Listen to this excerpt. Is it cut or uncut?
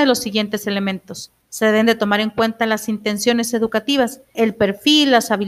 cut